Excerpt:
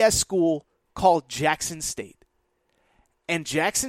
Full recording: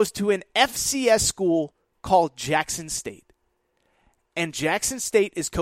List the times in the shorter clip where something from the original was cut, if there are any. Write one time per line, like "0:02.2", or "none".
none